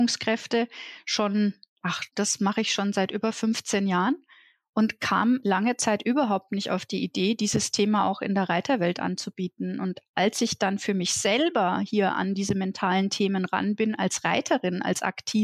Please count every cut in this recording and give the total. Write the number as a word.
one